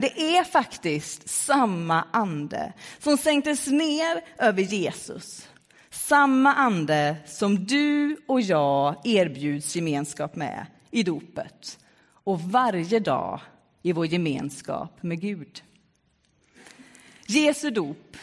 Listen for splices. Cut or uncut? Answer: uncut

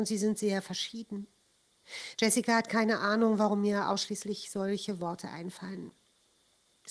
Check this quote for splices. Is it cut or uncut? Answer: cut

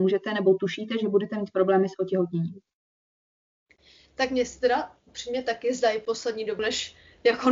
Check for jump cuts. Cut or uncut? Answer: cut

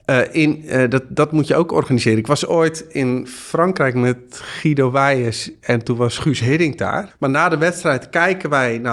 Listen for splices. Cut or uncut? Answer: cut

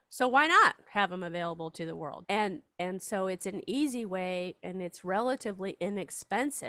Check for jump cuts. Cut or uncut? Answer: cut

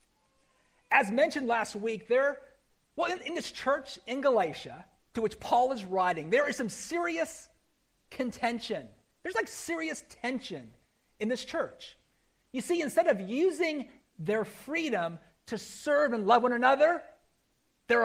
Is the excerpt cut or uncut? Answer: uncut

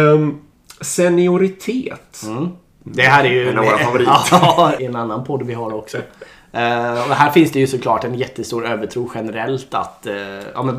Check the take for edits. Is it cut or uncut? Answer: cut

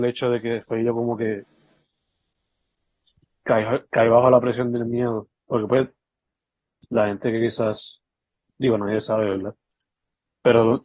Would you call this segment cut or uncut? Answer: uncut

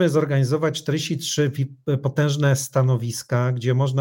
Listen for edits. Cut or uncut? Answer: uncut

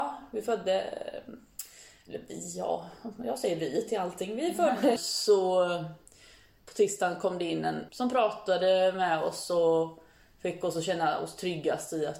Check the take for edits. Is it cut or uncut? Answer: cut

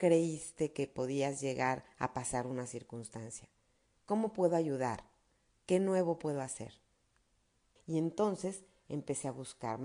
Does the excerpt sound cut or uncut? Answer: cut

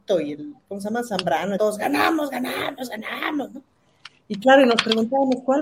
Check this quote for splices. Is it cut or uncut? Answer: cut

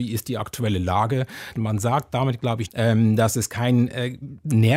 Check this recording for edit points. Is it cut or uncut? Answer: cut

